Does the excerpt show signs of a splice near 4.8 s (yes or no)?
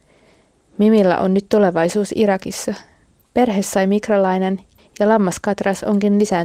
yes